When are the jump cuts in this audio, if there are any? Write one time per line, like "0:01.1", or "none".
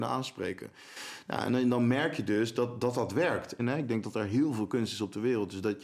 0:03.6